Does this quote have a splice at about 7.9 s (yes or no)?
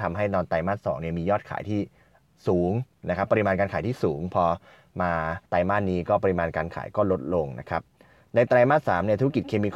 no